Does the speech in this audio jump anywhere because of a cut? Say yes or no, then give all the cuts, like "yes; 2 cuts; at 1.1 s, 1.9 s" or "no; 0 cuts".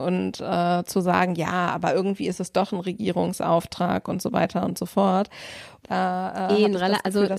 yes; 1 cut; at 5.8 s